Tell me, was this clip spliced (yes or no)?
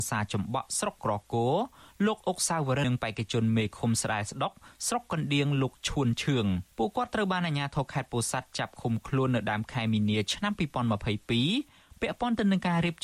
yes